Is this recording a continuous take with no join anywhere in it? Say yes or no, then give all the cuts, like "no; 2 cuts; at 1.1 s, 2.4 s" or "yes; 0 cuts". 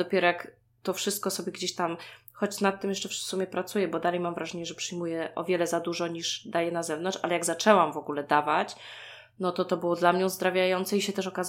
yes; 0 cuts